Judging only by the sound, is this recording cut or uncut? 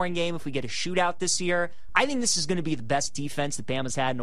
cut